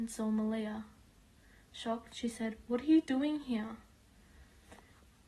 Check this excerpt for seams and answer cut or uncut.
uncut